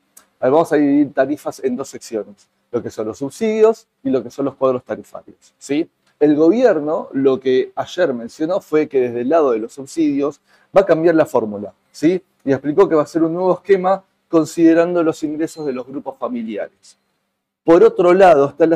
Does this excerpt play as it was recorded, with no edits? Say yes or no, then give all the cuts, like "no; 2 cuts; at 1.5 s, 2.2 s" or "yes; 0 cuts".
yes; 0 cuts